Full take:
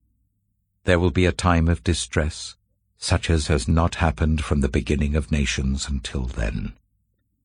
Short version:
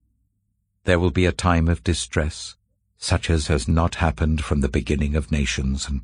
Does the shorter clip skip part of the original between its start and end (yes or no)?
no